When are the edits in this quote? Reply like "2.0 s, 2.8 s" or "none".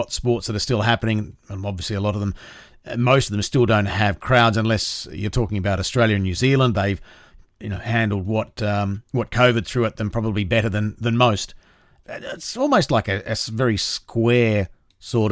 12.0 s